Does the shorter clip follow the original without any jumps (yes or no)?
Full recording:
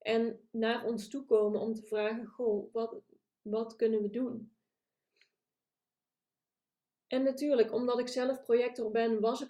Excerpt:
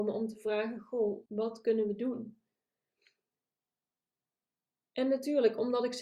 no